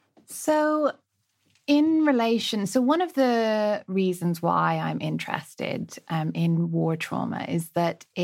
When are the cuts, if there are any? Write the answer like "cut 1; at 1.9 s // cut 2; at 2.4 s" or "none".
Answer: none